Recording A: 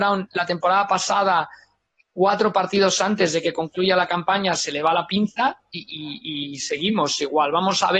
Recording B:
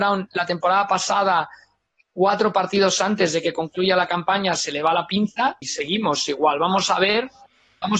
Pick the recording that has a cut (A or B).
B